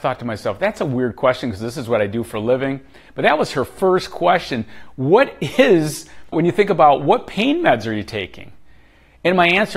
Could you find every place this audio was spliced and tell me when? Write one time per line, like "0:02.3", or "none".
0:06.3

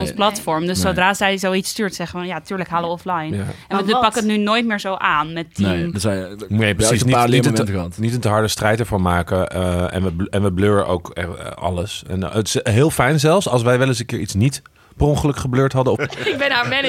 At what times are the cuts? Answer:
0:05.9
0:16.0

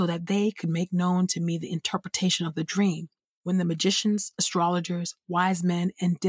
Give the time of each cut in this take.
none

